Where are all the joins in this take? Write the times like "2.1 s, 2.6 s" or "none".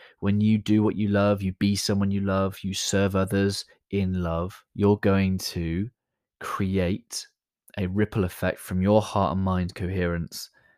4.6 s